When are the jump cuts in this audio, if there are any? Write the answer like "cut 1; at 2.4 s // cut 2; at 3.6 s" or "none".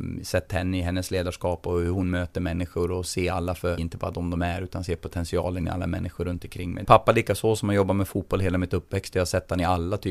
cut 1; at 3.8 s // cut 2; at 6.8 s